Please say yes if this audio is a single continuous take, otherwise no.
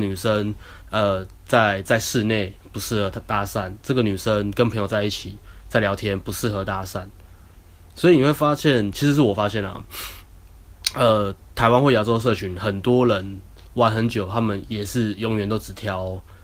yes